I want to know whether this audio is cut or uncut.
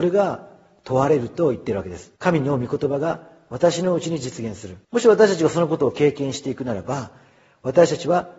cut